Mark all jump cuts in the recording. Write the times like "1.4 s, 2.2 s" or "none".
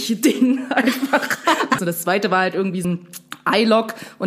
1.8 s, 2.8 s